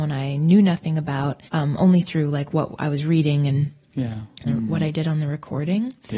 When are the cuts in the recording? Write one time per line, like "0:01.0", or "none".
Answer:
0:01.5
0:04.4